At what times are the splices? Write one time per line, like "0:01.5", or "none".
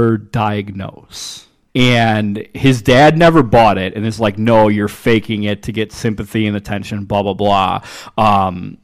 0:01.7

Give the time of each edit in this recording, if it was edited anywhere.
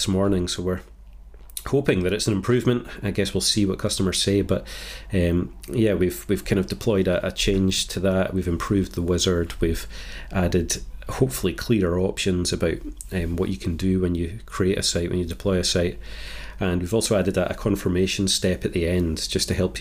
none

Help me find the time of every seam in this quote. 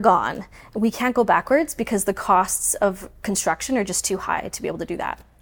none

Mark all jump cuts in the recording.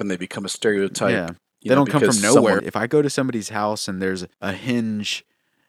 0:02.6
0:04.3

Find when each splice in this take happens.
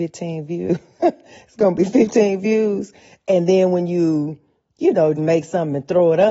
0:05.2

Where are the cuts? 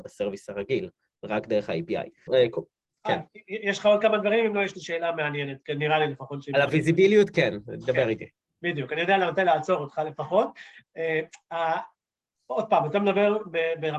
0:02.3

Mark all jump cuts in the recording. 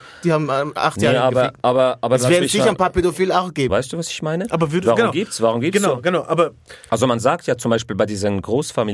0:03.7

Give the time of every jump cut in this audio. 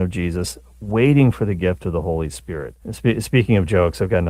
0:02.8

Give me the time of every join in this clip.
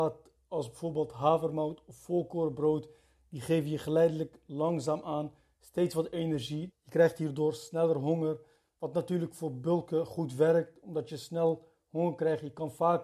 0:06.7

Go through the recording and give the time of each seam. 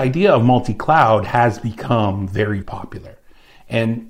0:02.6

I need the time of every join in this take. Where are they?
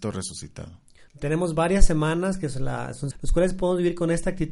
0:01.1
0:03.1

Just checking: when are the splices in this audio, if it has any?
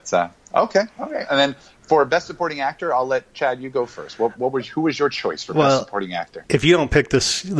none

